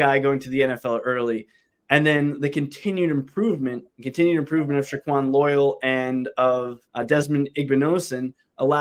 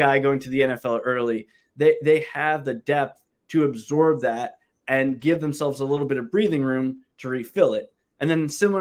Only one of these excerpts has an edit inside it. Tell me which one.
first; 3 cuts; at 1.7 s, 3.9 s, 6.9 s

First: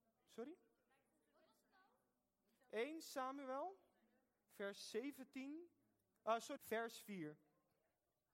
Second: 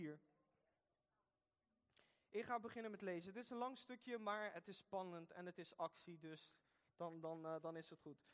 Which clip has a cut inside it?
first; 1 cut; at 6.6 s

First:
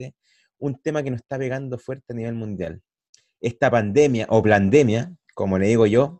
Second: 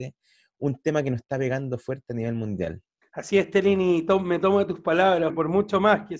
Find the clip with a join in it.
second; 2 cuts; at 3.0 s, 5.3 s

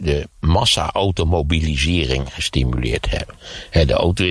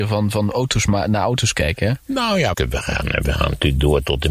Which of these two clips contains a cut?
second; 1 cut; at 2.5 s

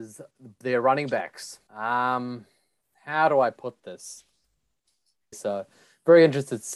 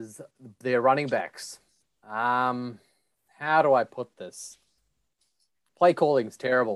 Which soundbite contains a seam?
first; 2 cuts; at 1.7 s, 5.3 s

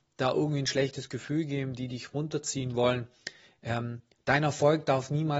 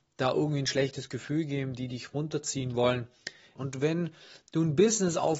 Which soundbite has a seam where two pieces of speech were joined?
second; 1 cut; at 3.6 s

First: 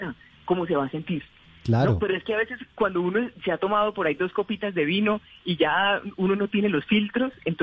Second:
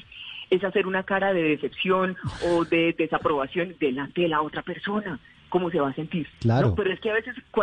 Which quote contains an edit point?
second; 1 cut; at 6.3 s

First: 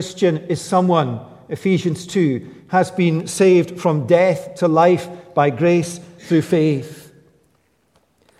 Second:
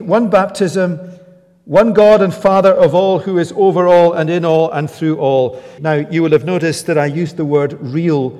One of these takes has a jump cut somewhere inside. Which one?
second; 1 cut; at 5.8 s

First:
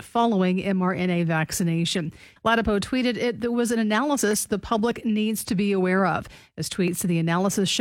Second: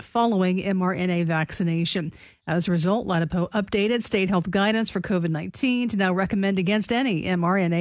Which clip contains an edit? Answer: first; 1 cut; at 2.4 s

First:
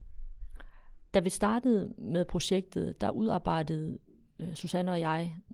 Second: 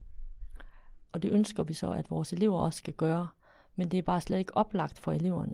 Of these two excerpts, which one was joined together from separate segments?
second; 1 cut; at 1.0 s

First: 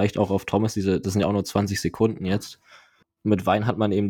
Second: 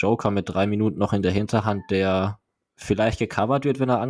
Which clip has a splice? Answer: first; 1 cut; at 3.0 s

